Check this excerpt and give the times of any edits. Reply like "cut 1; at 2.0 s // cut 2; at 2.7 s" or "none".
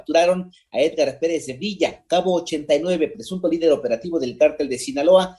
none